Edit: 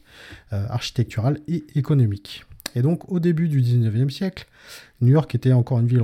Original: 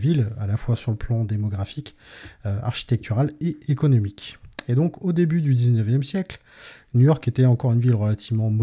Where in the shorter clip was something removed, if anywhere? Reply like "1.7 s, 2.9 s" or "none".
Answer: none